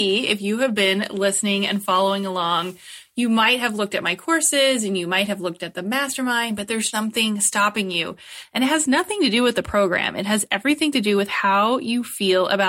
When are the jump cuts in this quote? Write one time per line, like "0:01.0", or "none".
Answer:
0:06.9